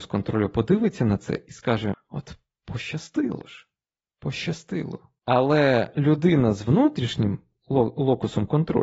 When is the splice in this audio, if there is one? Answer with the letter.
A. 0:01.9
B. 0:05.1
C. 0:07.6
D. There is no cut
A